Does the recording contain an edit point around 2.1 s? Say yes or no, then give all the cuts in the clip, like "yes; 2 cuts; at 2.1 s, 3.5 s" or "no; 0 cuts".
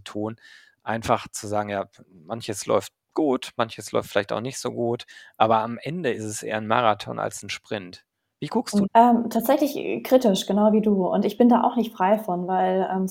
no; 1 cut; at 8.8 s